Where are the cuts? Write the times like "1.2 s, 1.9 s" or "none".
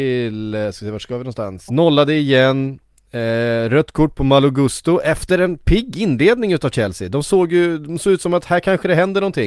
1.7 s